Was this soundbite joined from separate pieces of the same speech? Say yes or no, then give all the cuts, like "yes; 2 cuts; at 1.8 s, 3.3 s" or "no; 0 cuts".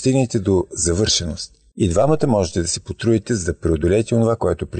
no; 0 cuts